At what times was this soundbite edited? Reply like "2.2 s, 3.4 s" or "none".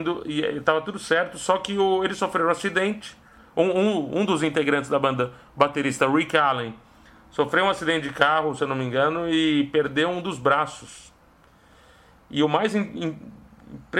none